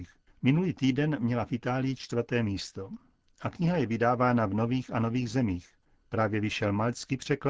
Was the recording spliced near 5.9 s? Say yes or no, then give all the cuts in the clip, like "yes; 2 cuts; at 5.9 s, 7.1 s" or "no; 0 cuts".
no; 0 cuts